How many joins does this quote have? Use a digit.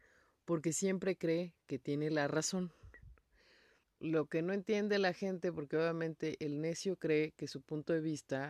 1